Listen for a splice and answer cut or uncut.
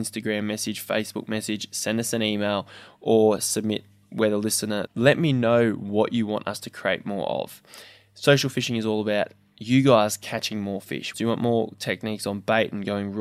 cut